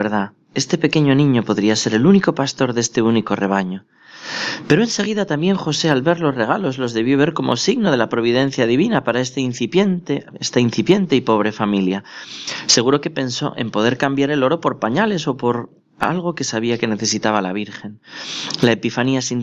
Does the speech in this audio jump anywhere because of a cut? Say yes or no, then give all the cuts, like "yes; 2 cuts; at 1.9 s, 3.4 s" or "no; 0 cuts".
no; 0 cuts